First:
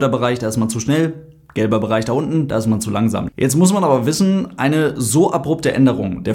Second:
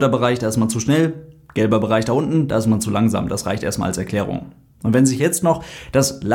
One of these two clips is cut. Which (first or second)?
first